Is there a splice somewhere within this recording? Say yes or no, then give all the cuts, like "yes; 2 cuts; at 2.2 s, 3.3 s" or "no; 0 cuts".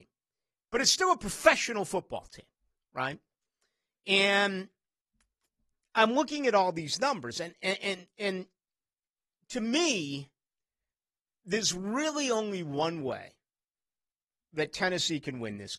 no; 0 cuts